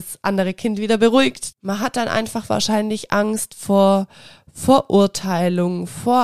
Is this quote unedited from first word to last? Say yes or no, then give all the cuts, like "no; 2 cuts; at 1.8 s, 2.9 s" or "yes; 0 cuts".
no; 1 cut; at 1.5 s